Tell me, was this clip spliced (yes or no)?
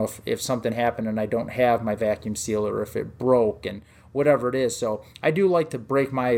no